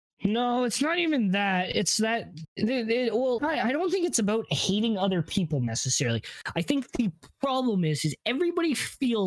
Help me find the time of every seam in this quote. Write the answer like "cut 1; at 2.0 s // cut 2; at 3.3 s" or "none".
cut 1; at 3.4 s